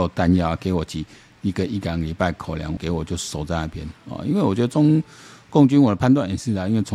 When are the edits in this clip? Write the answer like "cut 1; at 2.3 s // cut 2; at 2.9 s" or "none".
cut 1; at 2.8 s